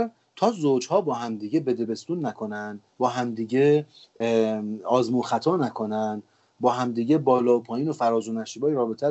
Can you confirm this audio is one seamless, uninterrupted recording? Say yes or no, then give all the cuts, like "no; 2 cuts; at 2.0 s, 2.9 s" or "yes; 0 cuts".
no; 1 cut; at 2.9 s